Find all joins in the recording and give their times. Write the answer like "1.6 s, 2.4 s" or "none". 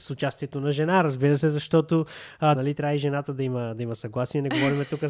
2.6 s